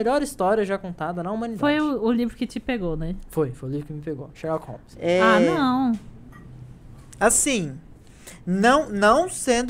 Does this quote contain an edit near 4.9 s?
yes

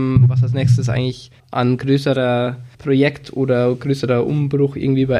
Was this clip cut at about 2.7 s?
yes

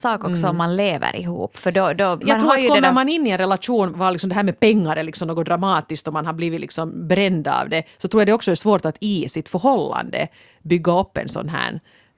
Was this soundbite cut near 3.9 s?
yes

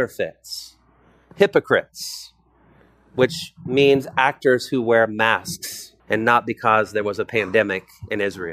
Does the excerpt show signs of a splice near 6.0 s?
yes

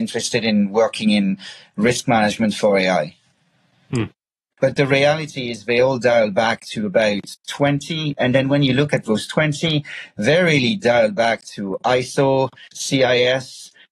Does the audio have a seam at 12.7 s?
yes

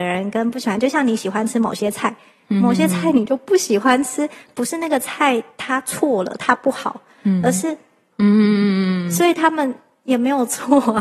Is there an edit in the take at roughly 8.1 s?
yes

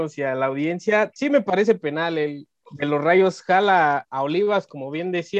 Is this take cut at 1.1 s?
no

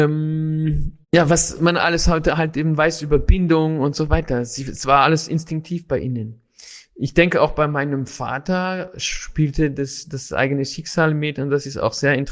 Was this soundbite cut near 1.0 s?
yes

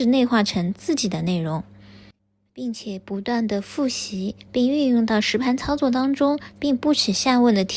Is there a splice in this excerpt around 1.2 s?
no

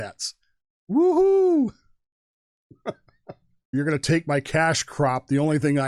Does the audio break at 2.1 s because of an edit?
no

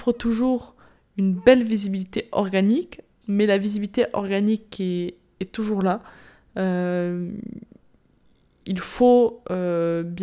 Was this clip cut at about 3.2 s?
yes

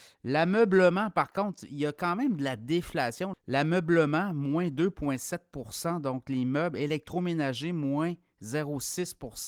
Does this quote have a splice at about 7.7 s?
no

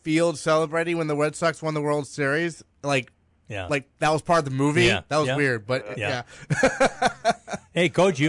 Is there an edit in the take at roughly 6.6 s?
no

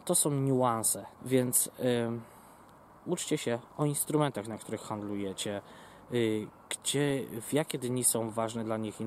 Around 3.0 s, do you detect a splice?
no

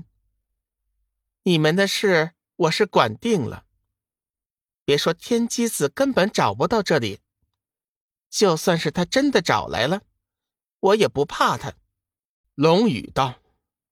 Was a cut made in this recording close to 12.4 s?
yes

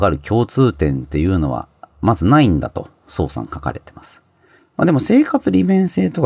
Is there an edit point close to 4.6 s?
yes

